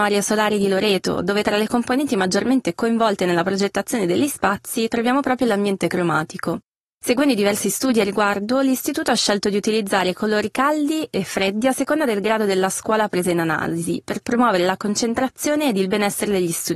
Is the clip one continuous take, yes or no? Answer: yes